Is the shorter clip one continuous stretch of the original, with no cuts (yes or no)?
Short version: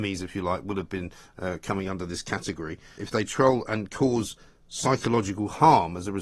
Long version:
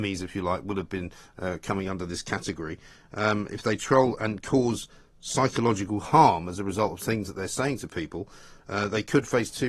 no